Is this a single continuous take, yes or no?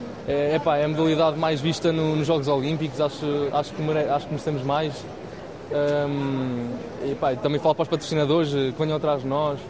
yes